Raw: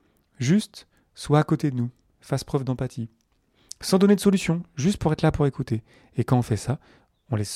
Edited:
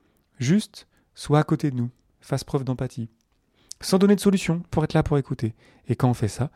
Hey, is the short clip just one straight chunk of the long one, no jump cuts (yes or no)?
no